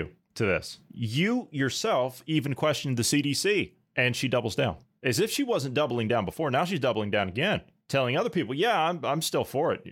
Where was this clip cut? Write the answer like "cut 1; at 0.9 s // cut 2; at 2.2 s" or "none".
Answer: none